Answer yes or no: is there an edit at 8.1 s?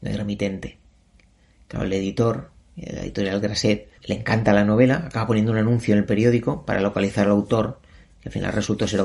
no